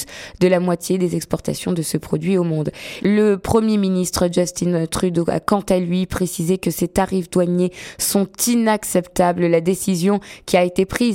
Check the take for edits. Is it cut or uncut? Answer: cut